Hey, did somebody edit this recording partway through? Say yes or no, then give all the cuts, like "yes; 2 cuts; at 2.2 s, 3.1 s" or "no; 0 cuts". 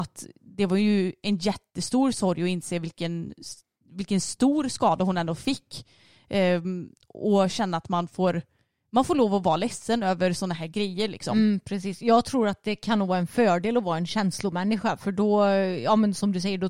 no; 0 cuts